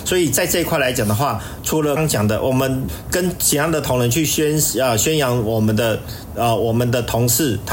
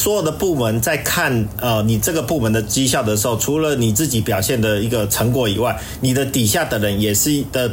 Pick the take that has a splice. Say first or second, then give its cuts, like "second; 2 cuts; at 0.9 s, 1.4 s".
first; 1 cut; at 2.0 s